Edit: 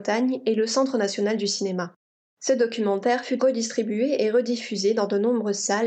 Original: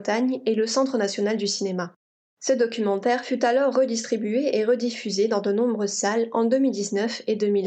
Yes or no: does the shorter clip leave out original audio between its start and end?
yes